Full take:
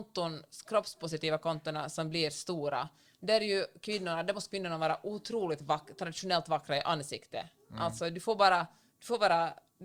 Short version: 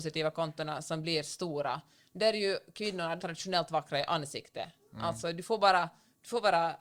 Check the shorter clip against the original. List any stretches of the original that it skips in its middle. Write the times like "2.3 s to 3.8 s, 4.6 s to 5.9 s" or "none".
4.2 s to 5.9 s